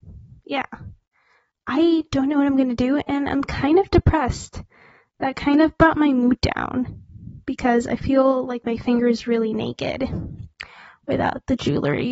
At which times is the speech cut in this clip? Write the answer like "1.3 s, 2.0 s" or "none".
none